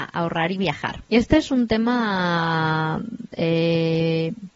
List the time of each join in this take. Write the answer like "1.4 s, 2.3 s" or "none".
1.1 s